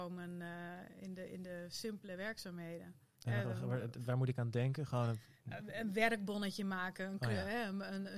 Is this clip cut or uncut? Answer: cut